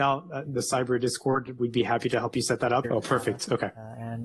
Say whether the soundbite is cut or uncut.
cut